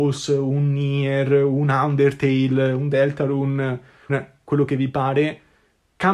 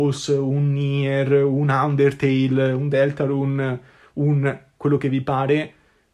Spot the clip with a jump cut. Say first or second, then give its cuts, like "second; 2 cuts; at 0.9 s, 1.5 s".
first; 1 cut; at 4.1 s